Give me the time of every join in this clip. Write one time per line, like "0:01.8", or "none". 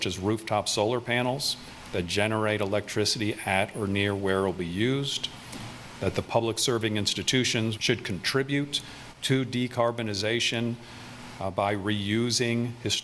0:07.8